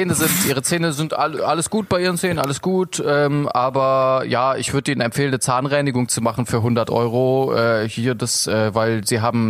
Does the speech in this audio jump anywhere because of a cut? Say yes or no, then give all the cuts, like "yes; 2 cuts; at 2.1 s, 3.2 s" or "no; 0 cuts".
yes; 1 cut; at 1.4 s